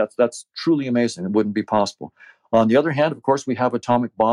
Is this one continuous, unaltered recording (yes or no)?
yes